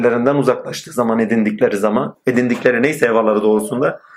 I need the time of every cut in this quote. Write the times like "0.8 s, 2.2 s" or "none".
2.1 s